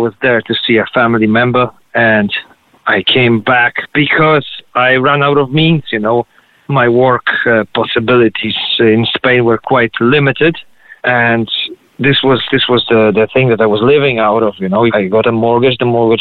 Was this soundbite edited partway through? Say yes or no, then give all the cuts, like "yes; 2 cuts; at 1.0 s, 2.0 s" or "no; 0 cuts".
yes; 3 cuts; at 11.0 s, 12.5 s, 14.9 s